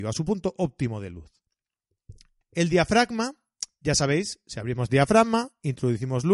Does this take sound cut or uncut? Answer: cut